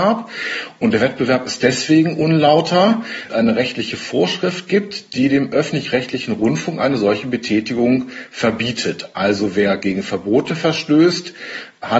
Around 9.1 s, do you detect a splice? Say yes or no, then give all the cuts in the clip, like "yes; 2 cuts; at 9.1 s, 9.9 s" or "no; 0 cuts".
no; 1 cut; at 3.3 s